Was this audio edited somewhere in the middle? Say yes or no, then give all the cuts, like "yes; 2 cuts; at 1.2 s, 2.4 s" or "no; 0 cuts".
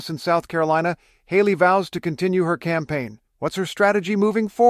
yes; 1 cut; at 3.3 s